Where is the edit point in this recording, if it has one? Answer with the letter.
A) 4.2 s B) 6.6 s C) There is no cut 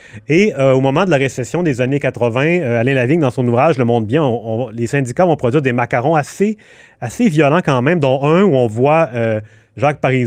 C